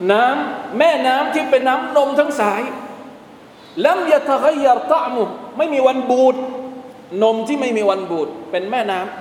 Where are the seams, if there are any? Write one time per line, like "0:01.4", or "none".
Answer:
0:01.6